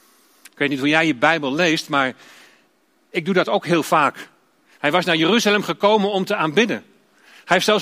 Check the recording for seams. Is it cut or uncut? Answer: cut